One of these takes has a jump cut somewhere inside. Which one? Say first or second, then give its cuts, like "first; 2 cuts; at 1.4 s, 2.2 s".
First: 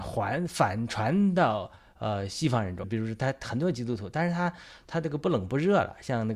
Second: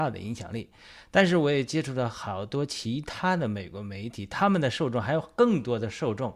first; 1 cut; at 2.8 s